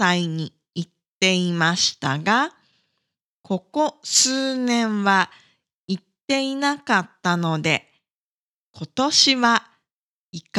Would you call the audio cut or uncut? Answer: uncut